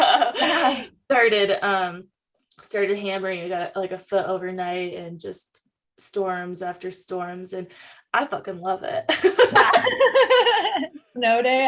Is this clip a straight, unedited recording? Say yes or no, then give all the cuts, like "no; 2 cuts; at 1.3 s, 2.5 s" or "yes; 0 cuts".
yes; 0 cuts